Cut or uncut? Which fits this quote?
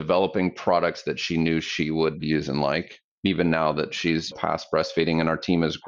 uncut